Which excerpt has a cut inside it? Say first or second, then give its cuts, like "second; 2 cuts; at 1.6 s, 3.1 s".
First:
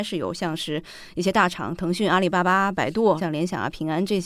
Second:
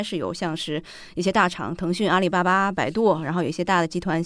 first; 1 cut; at 3.2 s